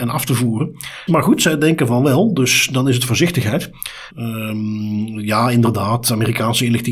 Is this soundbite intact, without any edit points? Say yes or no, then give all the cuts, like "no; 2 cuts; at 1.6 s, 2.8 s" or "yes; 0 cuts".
no; 2 cuts; at 1.1 s, 4.1 s